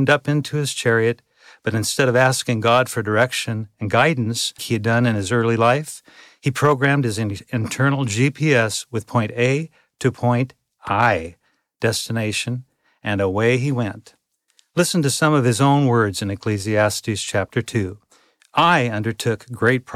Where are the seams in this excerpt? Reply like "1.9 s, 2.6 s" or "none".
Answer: 4.6 s